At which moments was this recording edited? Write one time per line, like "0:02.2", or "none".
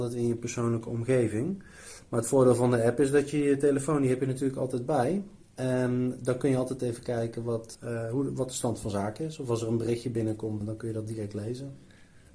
0:07.7
0:10.6